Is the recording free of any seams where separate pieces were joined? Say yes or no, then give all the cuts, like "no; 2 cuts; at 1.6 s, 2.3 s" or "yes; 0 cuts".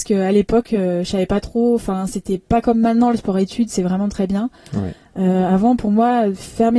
yes; 0 cuts